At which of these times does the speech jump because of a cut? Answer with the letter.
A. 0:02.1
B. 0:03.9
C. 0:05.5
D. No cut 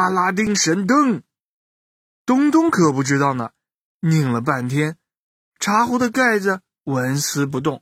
B